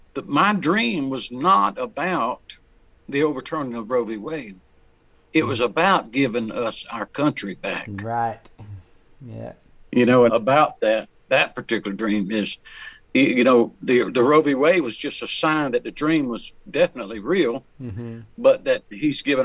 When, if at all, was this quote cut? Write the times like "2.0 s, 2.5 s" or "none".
10.3 s